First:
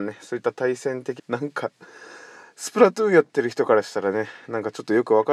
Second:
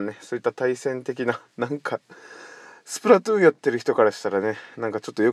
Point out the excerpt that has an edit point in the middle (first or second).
first